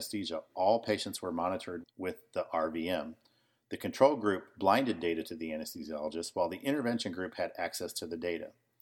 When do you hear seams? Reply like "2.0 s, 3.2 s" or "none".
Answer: 1.8 s

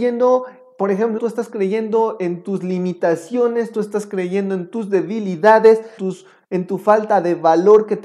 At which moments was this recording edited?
1.2 s, 6.0 s

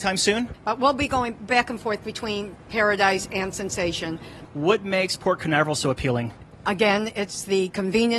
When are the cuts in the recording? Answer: 4.4 s

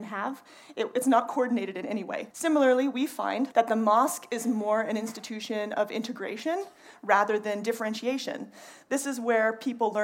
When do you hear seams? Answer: 2.3 s, 3.5 s

